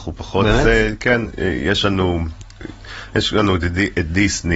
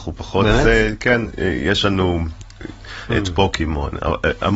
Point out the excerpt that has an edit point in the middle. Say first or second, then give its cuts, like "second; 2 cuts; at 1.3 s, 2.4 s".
second; 1 cut; at 3.1 s